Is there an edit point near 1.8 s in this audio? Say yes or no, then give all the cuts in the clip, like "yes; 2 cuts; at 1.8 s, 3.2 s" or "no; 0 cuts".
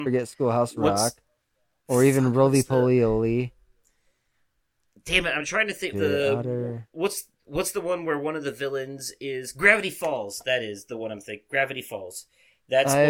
no; 1 cut; at 5.9 s